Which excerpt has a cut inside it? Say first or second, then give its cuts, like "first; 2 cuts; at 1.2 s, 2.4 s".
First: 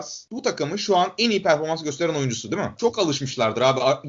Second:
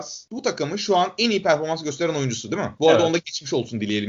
first; 1 cut; at 2.8 s